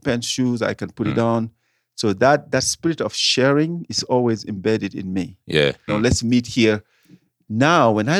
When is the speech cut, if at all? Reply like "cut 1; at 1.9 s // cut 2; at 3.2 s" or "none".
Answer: cut 1; at 5.9 s